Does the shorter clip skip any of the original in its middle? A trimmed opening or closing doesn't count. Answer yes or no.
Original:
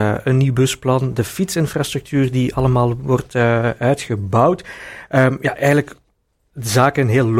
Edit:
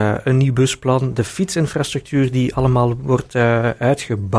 no